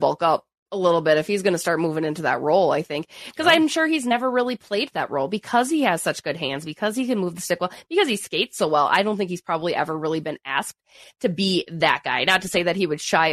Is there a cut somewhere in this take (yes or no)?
no